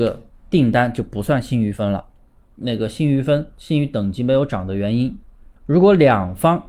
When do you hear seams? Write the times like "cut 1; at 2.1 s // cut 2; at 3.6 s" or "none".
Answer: cut 1; at 2.5 s // cut 2; at 5.6 s